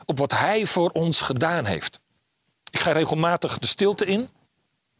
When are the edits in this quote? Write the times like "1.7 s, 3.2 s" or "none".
none